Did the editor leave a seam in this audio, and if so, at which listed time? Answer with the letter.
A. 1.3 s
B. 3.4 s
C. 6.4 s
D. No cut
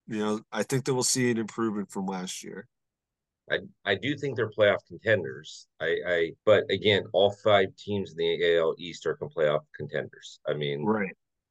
C